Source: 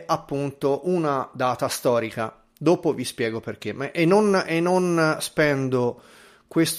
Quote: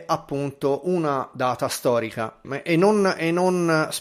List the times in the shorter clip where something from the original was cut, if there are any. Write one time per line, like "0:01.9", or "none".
0:02.4